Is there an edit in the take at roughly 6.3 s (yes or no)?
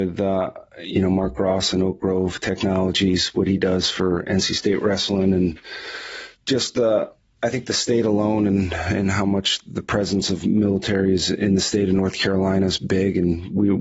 yes